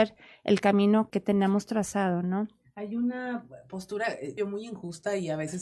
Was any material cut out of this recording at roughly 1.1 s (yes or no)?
yes